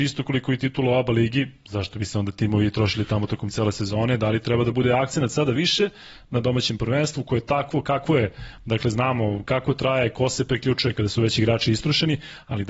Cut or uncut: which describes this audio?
cut